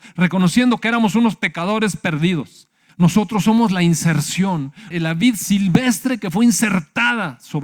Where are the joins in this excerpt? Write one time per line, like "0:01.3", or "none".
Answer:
0:02.9
0:04.9